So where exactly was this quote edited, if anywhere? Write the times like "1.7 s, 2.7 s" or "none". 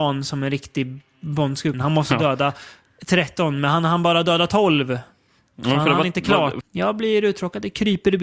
1.7 s, 6.6 s